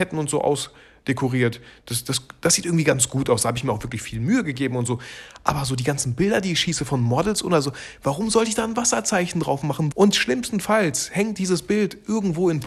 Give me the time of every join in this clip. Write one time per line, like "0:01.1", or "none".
0:09.9